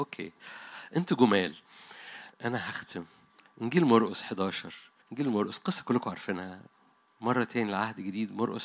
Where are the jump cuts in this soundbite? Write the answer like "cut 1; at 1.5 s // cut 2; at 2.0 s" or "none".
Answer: cut 1; at 2.3 s // cut 2; at 5.0 s